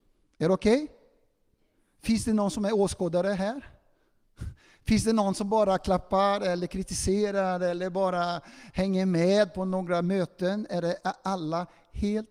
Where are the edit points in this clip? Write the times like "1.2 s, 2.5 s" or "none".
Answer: none